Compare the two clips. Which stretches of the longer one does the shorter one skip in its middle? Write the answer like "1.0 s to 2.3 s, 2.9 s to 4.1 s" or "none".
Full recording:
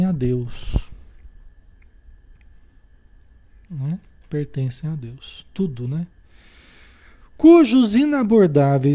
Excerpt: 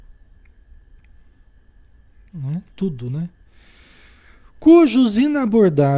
4.1 s to 5.5 s